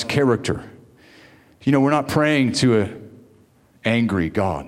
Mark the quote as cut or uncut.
cut